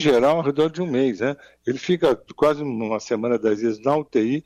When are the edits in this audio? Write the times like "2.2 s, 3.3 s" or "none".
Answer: none